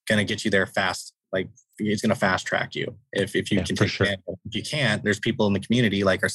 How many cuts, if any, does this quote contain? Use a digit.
1